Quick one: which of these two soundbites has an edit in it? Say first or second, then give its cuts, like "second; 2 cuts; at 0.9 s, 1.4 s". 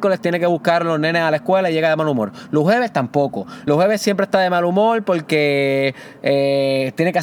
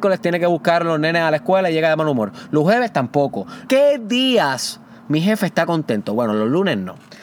second; 1 cut; at 3.7 s